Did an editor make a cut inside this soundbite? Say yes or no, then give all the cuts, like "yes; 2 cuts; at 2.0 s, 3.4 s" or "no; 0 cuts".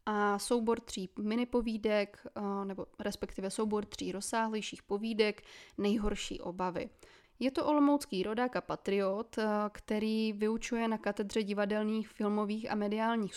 yes; 1 cut; at 7.2 s